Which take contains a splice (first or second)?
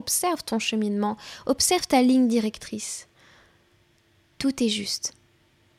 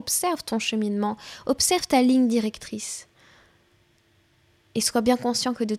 first